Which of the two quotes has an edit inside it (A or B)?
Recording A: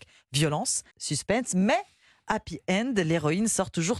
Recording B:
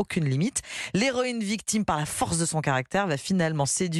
A